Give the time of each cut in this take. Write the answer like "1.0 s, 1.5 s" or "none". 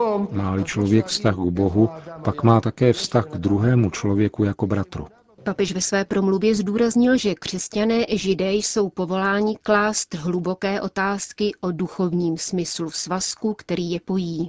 5.4 s